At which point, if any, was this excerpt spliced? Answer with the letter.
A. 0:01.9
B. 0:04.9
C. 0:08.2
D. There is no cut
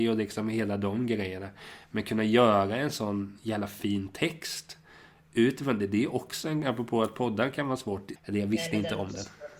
C